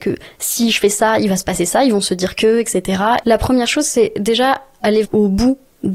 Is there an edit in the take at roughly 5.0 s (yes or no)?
yes